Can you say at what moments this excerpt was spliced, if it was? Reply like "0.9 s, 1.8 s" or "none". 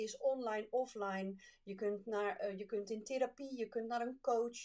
none